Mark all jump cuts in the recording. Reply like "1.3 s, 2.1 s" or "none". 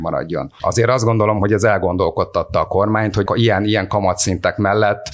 3.3 s